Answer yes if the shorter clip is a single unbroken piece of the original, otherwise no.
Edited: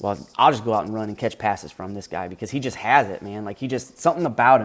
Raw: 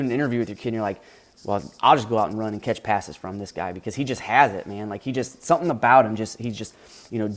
yes